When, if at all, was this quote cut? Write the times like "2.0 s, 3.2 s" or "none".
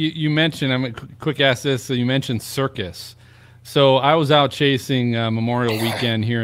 none